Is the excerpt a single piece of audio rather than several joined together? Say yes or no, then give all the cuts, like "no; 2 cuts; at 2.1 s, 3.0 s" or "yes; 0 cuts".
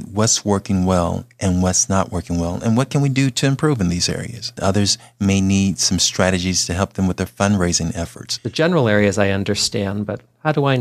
no; 2 cuts; at 4.6 s, 8.4 s